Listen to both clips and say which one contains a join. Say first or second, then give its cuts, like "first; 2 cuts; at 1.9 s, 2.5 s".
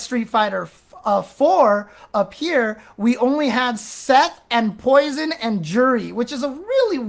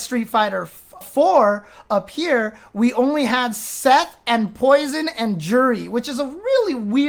second; 1 cut; at 1.0 s